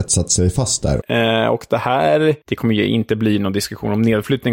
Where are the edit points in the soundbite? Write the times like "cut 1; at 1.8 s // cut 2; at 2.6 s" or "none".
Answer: cut 1; at 1.0 s // cut 2; at 2.4 s